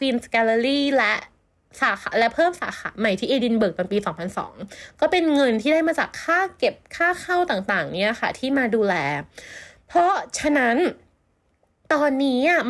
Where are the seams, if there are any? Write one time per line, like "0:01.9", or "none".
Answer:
none

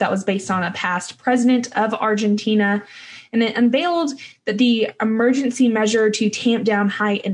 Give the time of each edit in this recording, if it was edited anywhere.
none

